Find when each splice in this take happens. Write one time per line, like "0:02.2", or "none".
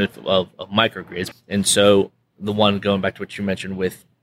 0:01.3